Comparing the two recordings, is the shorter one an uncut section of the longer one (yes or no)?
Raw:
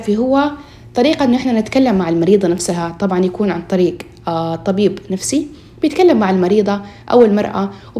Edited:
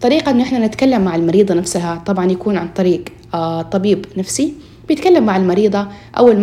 yes